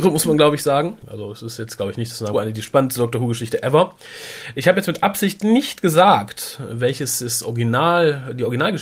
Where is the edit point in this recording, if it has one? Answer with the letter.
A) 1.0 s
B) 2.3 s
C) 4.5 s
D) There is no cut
B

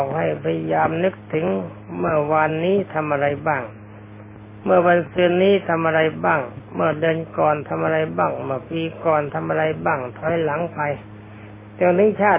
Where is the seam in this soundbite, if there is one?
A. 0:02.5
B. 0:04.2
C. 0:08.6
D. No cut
D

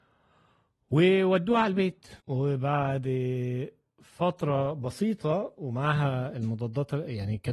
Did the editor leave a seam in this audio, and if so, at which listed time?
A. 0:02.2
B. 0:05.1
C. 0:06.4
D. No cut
A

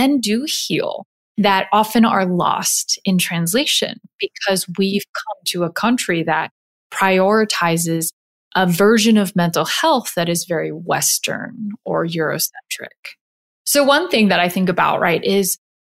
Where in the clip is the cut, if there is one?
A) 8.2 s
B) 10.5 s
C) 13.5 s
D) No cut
C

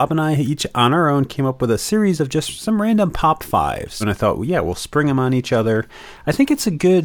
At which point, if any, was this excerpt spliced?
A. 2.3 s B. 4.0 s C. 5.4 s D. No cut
B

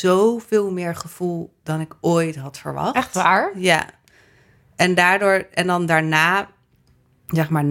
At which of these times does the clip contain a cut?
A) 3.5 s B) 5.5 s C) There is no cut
C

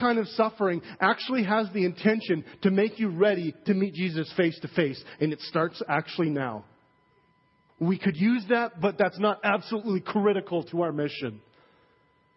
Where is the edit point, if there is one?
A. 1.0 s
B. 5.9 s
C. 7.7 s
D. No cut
C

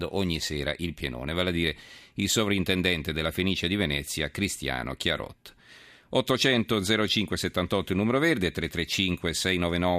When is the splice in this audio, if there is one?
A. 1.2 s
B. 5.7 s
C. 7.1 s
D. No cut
C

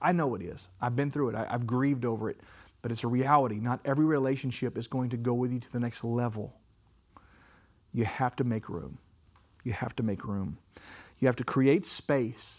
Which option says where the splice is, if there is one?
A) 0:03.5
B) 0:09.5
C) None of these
C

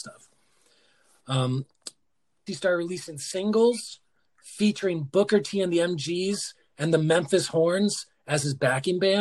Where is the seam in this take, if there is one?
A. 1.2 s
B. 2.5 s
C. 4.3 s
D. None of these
B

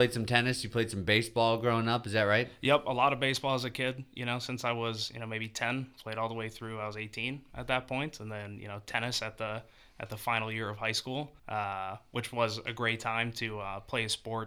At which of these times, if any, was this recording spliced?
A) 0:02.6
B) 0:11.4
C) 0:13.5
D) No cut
B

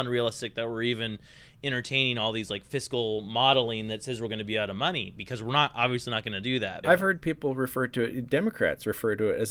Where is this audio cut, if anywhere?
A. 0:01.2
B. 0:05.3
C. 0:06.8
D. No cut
C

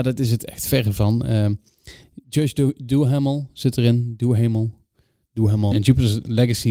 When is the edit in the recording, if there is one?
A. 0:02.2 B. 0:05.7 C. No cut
B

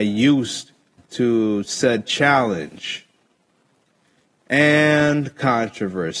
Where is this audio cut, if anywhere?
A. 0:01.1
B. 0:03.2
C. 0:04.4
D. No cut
D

